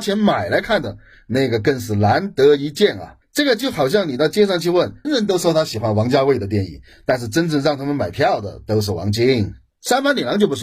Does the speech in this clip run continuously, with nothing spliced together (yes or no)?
no